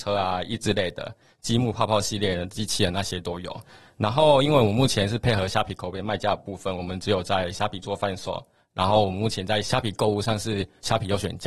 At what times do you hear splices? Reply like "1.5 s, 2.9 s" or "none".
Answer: none